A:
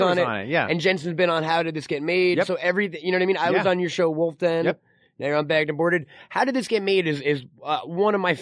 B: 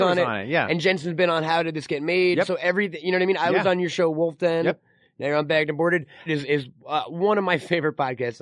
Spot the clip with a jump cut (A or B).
B